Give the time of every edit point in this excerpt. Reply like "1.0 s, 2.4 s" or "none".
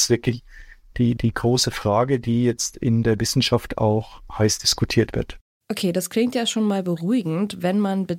none